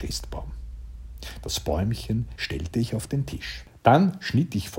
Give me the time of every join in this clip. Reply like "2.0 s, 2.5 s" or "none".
2.4 s